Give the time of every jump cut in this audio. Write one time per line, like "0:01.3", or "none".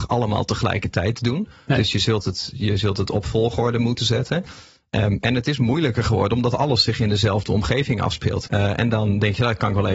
0:08.5

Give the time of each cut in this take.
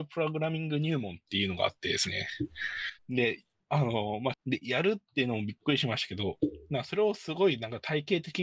0:03.0
0:04.3

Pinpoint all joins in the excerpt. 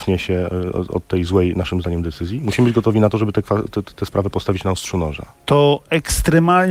none

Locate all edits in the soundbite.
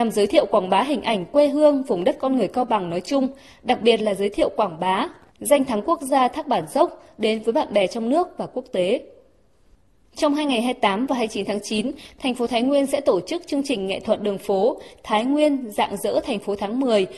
none

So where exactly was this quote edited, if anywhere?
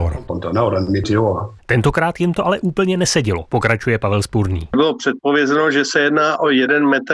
0:01.6

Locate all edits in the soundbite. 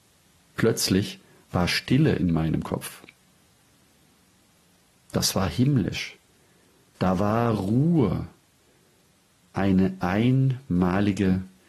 none

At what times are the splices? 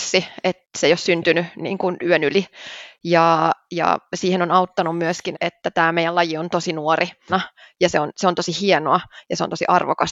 0:05.3
0:07.3

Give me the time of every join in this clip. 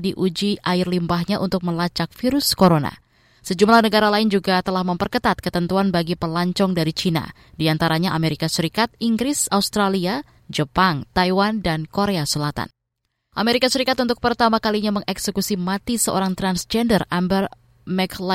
none

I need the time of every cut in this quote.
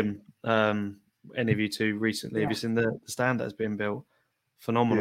none

